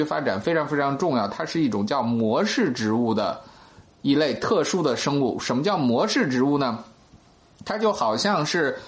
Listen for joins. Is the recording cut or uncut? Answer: uncut